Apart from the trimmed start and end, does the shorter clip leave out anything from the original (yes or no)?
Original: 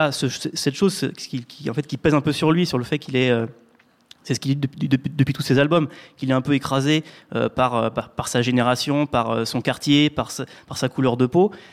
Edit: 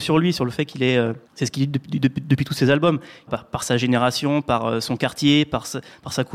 yes